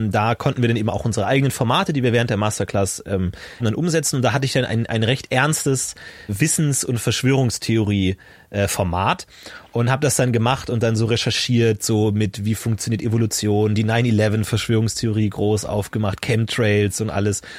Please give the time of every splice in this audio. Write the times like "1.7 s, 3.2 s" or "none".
3.6 s, 6.3 s